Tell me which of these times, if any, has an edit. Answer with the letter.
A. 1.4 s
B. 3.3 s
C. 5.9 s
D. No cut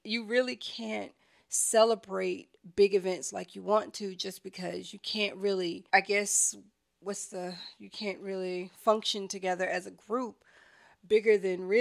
C